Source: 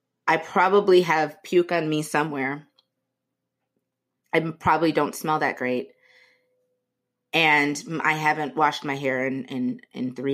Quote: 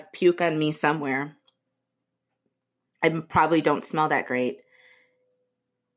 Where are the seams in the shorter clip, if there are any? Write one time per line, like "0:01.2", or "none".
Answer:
none